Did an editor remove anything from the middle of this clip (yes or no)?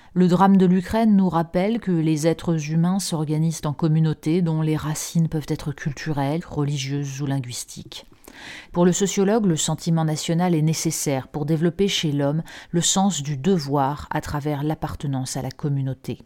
yes